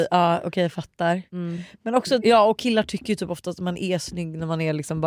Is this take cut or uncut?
cut